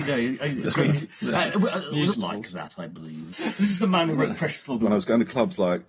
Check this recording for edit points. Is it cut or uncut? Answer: cut